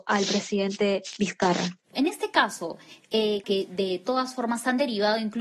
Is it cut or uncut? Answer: cut